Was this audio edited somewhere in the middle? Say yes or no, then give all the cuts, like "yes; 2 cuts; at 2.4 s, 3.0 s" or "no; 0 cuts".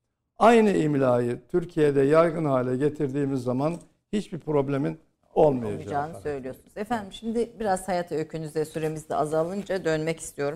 no; 0 cuts